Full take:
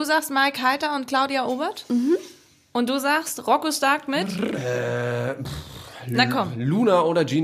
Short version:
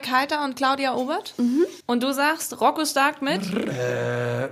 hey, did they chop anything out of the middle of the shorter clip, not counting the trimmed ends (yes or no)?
yes